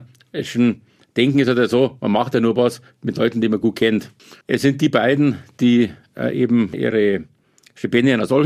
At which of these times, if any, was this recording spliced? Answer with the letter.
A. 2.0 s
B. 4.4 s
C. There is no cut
B